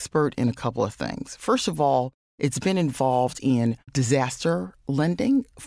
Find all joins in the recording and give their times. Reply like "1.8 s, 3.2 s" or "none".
none